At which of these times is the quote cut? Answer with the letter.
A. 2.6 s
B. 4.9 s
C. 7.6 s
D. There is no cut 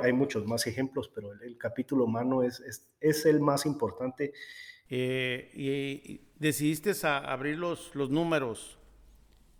B